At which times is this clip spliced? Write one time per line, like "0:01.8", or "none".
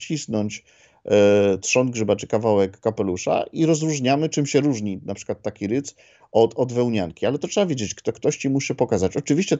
none